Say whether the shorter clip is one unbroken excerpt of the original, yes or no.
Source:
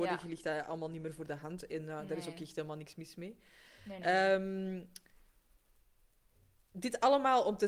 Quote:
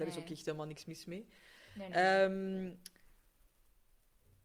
yes